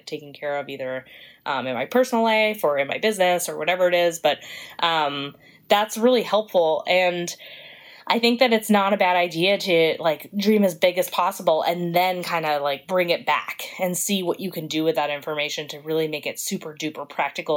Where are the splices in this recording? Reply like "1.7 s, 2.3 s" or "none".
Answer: none

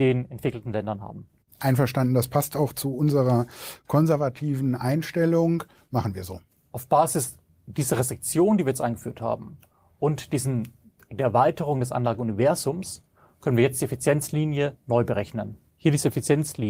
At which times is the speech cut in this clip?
none

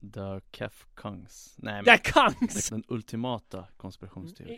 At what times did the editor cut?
2.7 s

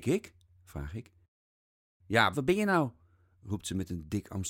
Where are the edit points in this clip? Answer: 2.3 s

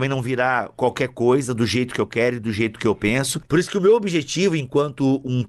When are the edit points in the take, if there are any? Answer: 3.4 s

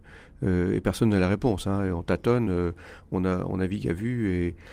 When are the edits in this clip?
none

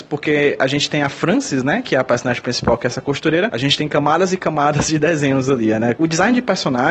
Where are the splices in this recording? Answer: 3.5 s, 6.0 s

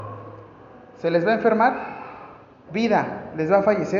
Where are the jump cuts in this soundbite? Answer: 2.6 s

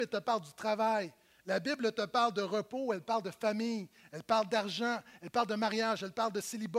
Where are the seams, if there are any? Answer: none

